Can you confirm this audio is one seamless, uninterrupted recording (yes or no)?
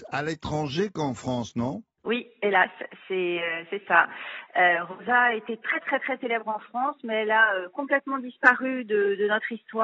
yes